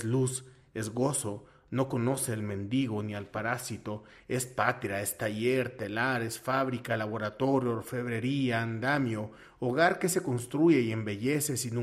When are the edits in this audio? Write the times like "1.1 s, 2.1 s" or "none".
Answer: none